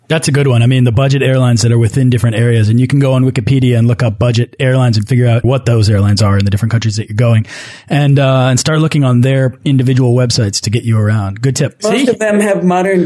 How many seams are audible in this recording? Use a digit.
0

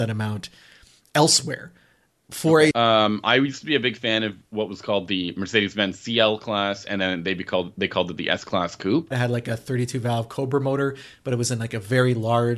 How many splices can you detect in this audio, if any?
2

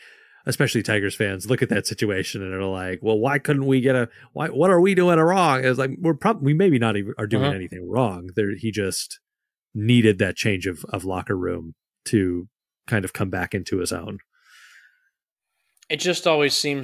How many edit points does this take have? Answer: 0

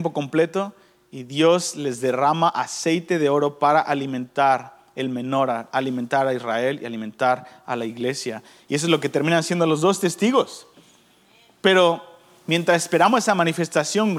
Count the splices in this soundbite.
0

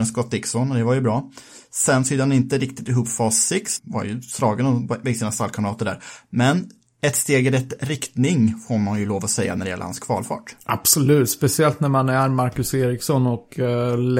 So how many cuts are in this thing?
1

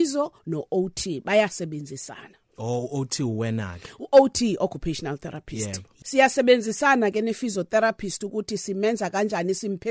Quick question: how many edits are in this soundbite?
1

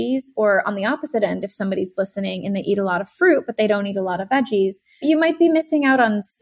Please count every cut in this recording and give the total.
1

